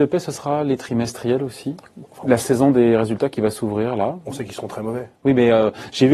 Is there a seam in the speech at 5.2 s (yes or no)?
yes